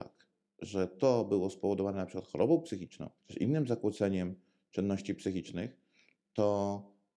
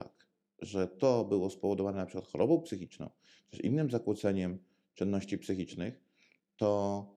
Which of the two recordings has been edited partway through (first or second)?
first